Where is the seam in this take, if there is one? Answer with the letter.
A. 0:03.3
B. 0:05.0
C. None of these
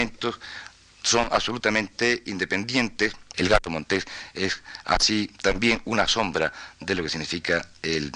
A